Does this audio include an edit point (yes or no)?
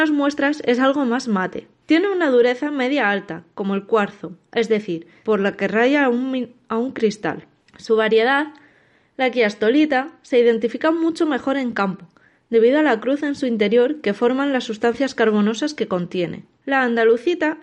yes